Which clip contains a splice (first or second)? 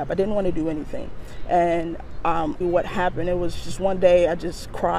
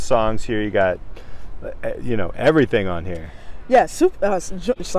first